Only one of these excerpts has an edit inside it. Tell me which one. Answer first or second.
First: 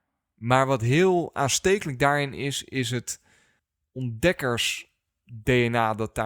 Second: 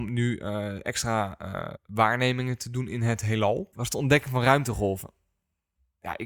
second